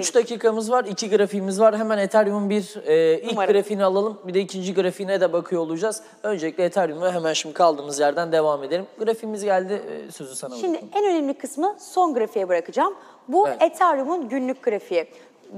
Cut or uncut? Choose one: uncut